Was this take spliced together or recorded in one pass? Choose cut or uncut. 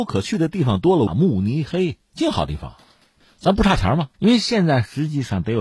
cut